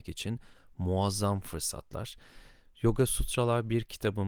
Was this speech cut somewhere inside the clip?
no; 0 cuts

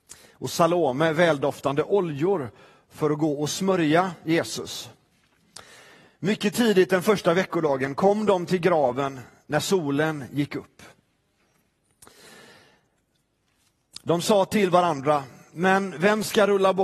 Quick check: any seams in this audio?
no; 0 cuts

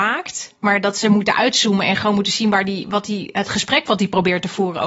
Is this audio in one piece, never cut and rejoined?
yes; 0 cuts

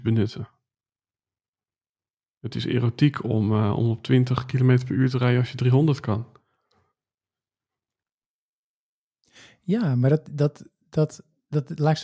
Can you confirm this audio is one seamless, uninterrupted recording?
yes; 0 cuts

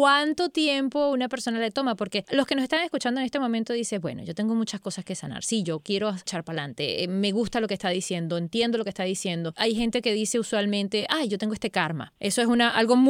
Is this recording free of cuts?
yes; 0 cuts

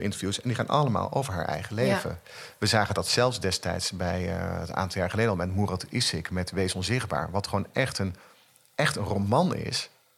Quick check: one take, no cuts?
yes; 0 cuts

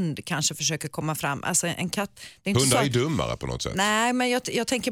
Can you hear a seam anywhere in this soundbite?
no; 0 cuts

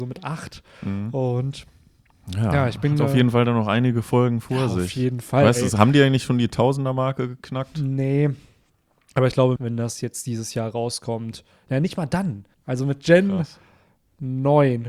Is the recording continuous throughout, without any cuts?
no; 2 cuts; at 9.6 s, 12.5 s

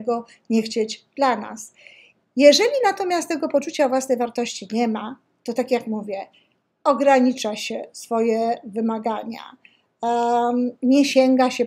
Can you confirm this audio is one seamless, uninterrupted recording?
no; 1 cut; at 2.2 s

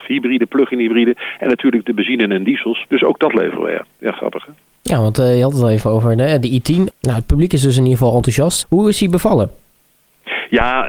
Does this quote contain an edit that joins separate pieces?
yes; 3 cuts; at 2.8 s, 6.9 s, 8.6 s

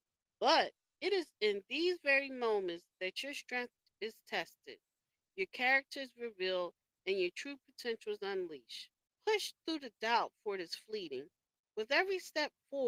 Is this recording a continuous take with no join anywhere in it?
no; 2 cuts; at 9.1 s, 11.6 s

